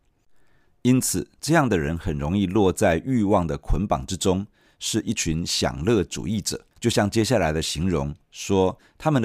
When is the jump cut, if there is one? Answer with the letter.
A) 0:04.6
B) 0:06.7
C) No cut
B